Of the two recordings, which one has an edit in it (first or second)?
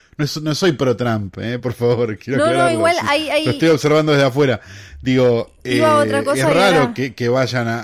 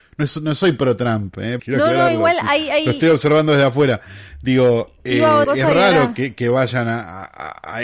second